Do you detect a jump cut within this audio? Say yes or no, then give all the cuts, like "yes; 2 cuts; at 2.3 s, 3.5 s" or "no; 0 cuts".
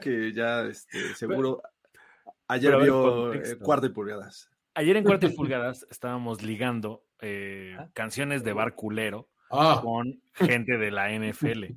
no; 0 cuts